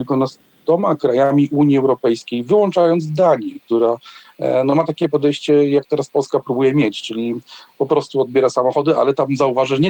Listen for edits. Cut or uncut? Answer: uncut